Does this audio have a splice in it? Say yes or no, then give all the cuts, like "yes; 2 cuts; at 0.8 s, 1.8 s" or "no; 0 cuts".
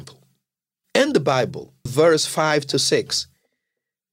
yes; 1 cut; at 1.9 s